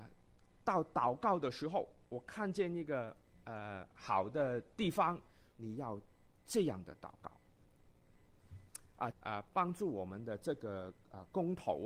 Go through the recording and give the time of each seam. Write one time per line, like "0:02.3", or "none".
0:05.5
0:09.1

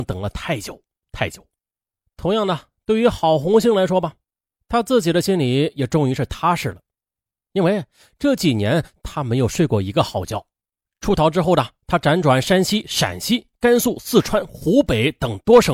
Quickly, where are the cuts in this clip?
none

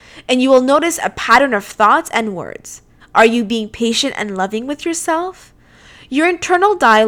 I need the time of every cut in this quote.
0:03.0

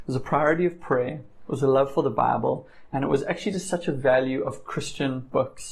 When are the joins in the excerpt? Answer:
none

